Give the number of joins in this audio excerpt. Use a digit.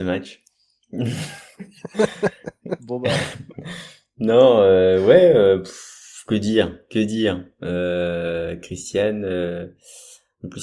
0